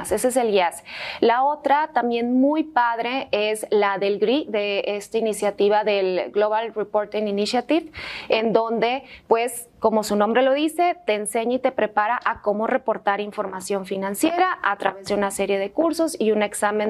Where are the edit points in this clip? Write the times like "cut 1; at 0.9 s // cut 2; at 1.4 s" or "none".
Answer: none